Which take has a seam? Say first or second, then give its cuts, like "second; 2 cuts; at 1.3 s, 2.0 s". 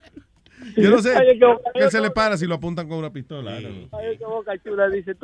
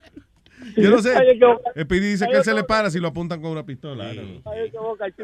first; 1 cut; at 1.7 s